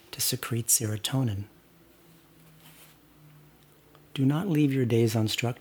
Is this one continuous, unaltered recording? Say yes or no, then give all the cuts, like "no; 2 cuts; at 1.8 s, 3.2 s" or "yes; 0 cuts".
yes; 0 cuts